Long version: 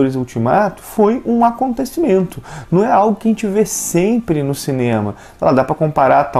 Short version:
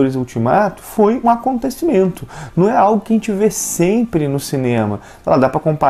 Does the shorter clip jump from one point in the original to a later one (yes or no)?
yes